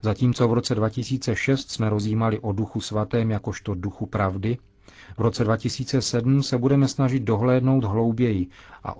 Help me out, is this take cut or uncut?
uncut